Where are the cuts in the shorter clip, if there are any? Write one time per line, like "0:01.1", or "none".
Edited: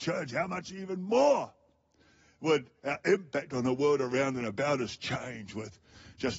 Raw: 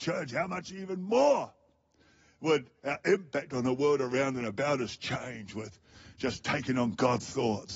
none